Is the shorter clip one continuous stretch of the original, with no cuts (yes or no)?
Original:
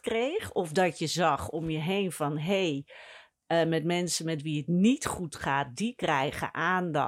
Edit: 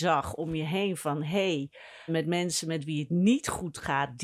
no